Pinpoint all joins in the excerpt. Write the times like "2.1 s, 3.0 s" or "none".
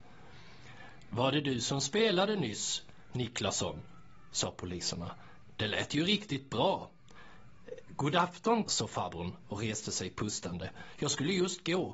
8.6 s